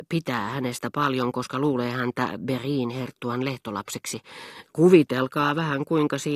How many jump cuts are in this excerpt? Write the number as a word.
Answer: one